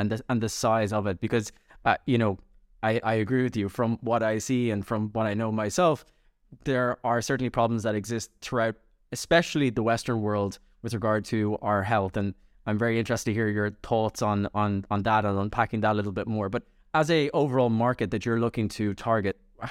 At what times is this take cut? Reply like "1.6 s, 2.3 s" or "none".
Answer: none